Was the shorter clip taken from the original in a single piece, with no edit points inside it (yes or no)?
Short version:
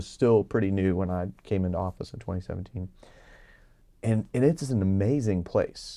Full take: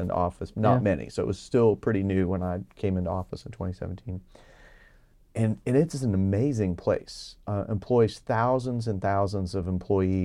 yes